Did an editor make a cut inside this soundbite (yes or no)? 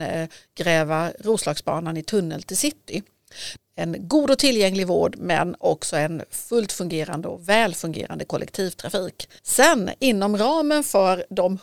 yes